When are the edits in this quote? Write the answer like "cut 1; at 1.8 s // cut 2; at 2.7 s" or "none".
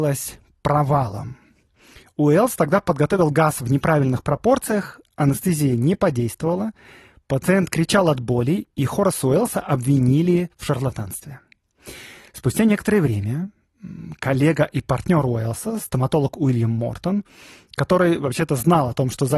none